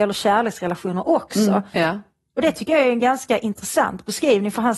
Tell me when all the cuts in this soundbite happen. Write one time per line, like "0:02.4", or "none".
0:01.7